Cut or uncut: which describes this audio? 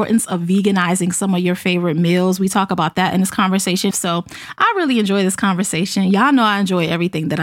cut